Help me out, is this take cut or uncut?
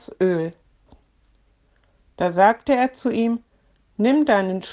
uncut